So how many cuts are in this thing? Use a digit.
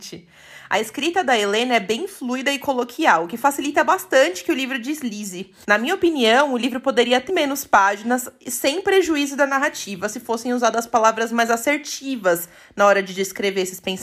2